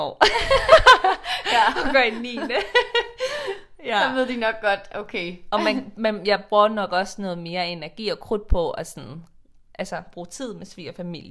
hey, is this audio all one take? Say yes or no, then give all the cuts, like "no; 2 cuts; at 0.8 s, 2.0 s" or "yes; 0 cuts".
yes; 0 cuts